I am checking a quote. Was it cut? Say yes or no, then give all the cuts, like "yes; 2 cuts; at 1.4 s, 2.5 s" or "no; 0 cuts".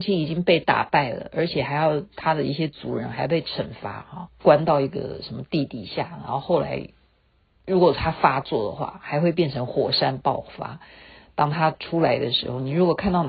yes; 1 cut; at 4.3 s